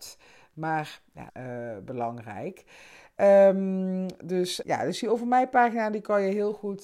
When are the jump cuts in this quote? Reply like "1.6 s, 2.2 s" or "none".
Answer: 1.3 s, 4.6 s